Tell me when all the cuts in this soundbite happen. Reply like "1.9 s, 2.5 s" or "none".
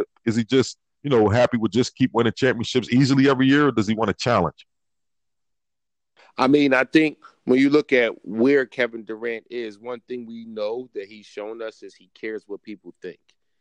none